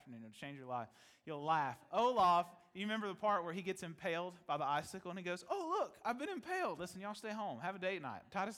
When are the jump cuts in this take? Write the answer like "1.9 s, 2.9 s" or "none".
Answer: 6.8 s